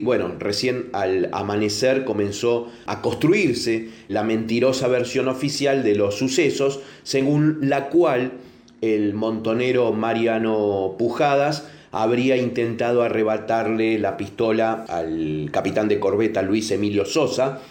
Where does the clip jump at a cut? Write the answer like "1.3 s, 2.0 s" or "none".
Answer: 4.1 s